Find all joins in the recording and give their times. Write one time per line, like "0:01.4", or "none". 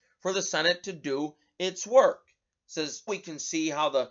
0:03.1